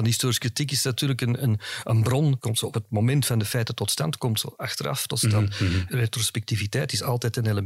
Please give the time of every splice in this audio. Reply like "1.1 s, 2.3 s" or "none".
2.4 s